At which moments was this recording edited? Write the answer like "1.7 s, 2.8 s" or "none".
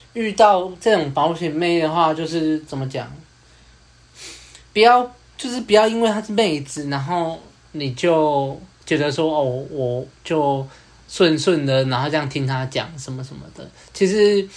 none